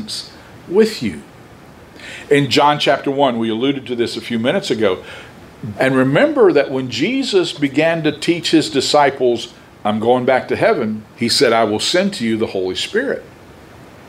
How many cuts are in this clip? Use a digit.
2